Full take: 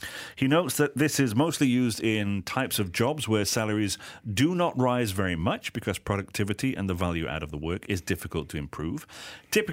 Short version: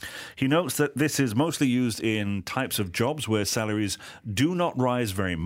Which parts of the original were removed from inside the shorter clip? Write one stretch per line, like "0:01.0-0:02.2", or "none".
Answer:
none